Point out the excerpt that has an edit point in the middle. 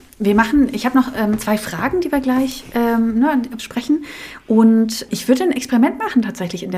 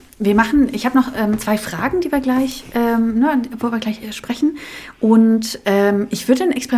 first; 2 cuts; at 3.6 s, 5.1 s

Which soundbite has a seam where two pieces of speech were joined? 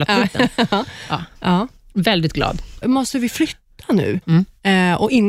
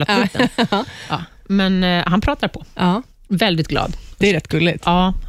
first; 3 cuts; at 1.3 s, 2.8 s, 4.2 s

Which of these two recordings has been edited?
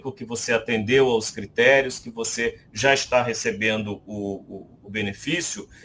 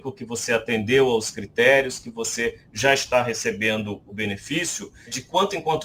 second; 1 cut; at 4.0 s

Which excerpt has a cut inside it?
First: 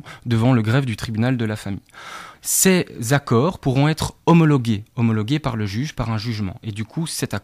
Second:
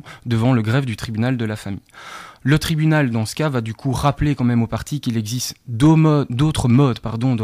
first; 1 cut; at 2.3 s

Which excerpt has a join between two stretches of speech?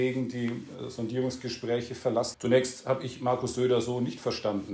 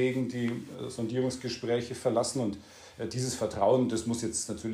first; 1 cut; at 2.3 s

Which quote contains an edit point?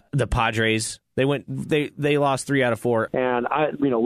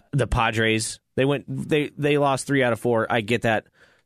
first; 1 cut; at 3.1 s

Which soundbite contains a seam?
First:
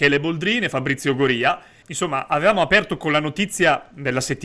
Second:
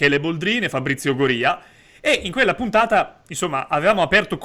first; 1 cut; at 1.8 s

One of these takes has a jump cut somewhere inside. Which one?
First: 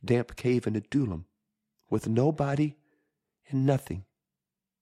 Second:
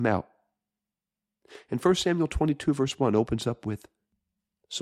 first; 1 cut; at 1.7 s

